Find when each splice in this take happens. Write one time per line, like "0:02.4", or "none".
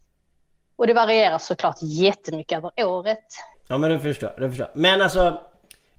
0:03.5

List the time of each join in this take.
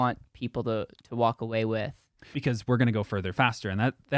0:02.3

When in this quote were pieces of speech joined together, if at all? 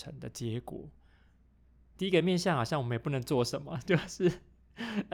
0:01.9

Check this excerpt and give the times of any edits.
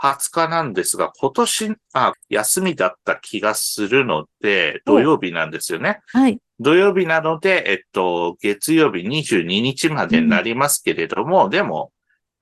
0:02.1

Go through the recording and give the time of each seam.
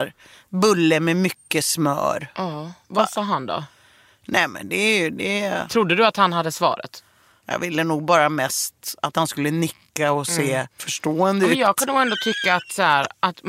none

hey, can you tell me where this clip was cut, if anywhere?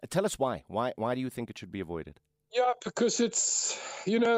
none

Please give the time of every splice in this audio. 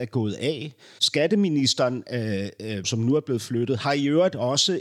0:01.0
0:02.8

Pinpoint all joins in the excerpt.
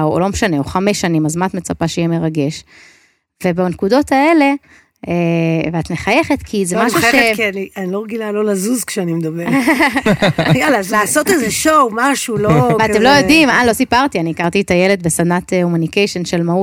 0:10.9

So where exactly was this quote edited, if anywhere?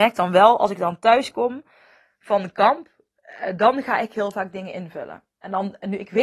none

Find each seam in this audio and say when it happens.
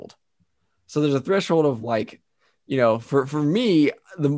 none

